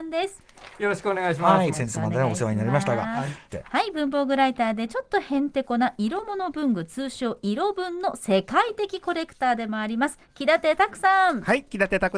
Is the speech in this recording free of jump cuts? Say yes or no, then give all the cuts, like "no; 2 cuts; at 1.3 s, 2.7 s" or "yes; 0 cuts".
no; 2 cuts; at 1.7 s, 3.5 s